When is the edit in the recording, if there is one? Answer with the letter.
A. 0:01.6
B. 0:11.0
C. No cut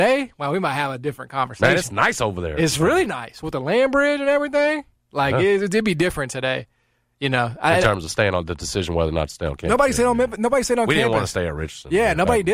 C